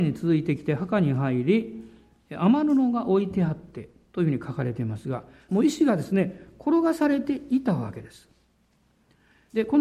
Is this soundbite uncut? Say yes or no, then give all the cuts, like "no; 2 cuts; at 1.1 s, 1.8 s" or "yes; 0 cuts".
no; 1 cut; at 5.5 s